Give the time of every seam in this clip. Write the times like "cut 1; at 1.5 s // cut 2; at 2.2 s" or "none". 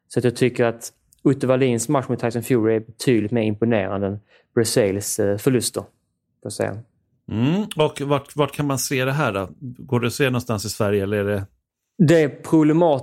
none